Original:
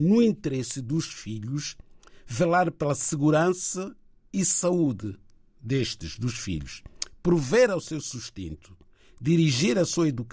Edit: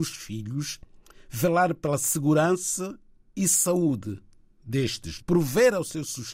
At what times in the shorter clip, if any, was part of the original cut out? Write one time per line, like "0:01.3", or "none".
0:05.2